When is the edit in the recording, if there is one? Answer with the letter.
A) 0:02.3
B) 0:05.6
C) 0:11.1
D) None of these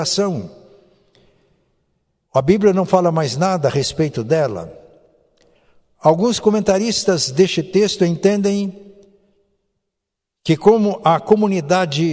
A